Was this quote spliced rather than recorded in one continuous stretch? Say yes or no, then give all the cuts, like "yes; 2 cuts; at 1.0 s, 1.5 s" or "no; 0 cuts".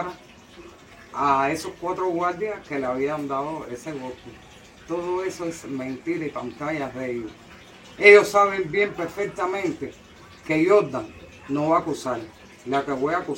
no; 0 cuts